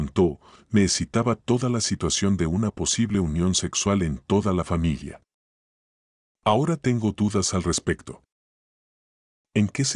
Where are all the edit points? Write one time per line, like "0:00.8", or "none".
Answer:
none